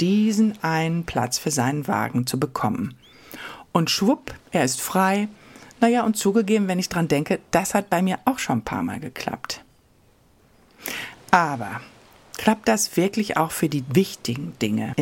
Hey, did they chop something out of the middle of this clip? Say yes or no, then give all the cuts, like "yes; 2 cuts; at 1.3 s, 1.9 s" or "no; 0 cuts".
no; 0 cuts